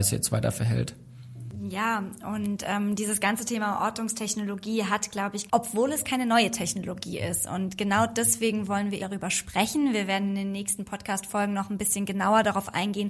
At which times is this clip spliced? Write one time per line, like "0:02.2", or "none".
0:05.5
0:09.0